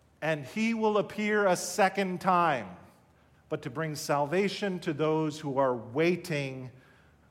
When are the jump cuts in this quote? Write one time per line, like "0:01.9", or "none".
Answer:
0:03.3